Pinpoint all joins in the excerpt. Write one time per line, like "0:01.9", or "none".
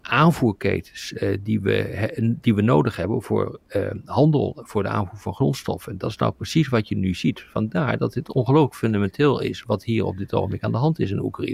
none

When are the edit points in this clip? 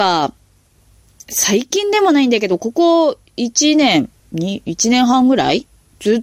none

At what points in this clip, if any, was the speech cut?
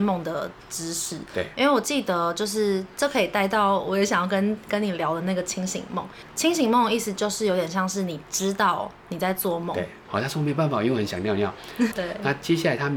0:10.1
0:11.9

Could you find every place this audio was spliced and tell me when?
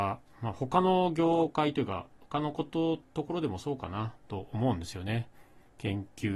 none

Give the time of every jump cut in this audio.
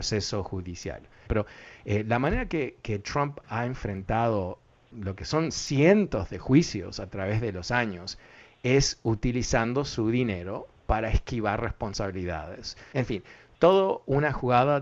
0:01.3
0:12.9

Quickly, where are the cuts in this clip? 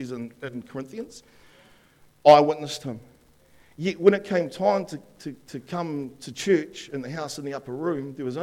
none

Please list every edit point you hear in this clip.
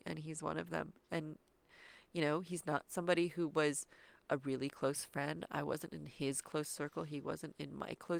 none

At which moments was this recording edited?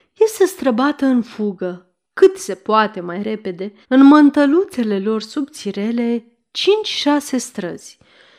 0:03.8

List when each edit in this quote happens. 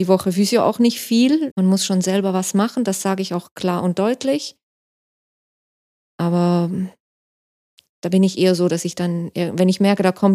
0:01.5

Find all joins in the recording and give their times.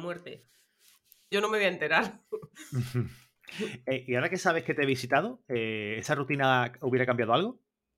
0:01.3

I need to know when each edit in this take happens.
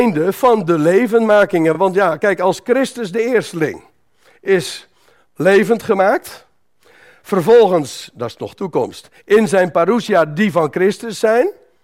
none

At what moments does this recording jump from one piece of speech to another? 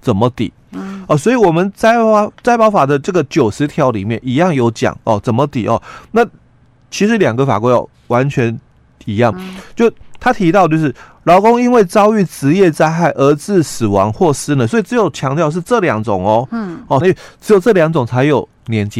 0:09.3
0:17.0

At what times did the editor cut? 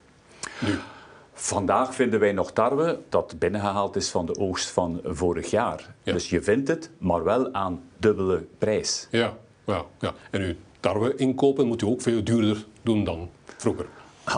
0:03.1
0:06.1

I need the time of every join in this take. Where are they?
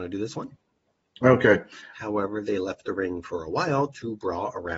0:01.9

